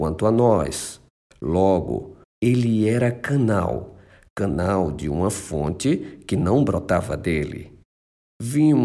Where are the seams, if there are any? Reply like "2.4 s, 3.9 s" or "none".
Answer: 2.2 s